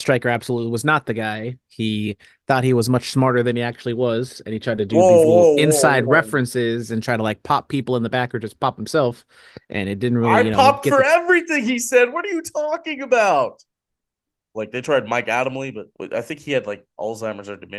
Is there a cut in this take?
yes; 2 cuts; at 14.5 s, 15.9 s

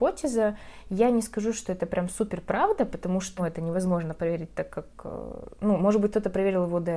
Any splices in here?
yes; 1 cut; at 3.4 s

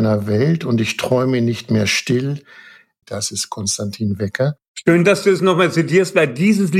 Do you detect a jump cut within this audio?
yes; 1 cut; at 3.0 s

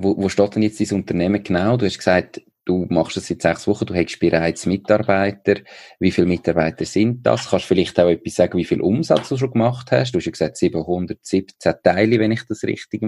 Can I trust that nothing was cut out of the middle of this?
yes; 0 cuts

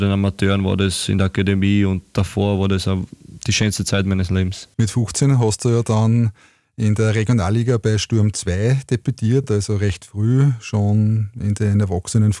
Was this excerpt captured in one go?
yes; 0 cuts

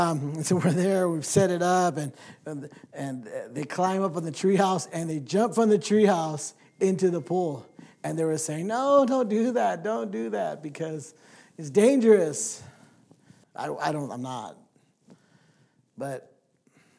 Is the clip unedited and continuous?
no; 1 cut; at 13.4 s

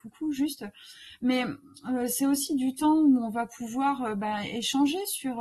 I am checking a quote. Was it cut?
no; 0 cuts

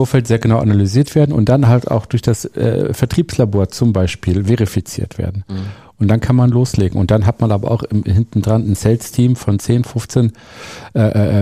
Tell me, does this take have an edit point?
no; 0 cuts

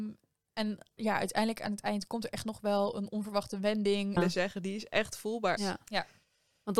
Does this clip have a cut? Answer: yes; 2 cuts; at 4.2 s, 5.6 s

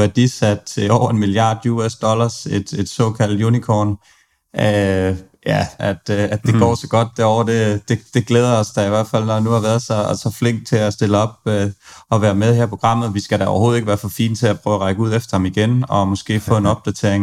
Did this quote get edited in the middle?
yes; 1 cut; at 5.8 s

